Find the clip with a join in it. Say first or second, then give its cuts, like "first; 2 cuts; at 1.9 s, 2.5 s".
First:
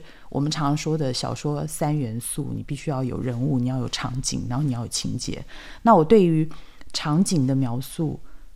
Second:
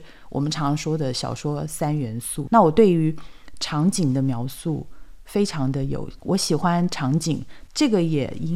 second; 2 cuts; at 2.5 s, 6.2 s